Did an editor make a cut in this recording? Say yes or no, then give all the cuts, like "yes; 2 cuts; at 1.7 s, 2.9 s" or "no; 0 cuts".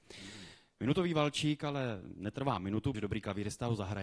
yes; 1 cut; at 2.9 s